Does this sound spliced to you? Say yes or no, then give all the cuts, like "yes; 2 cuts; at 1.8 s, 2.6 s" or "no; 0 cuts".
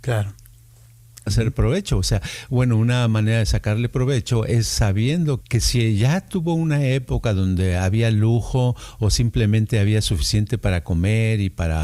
yes; 2 cuts; at 1.3 s, 5.4 s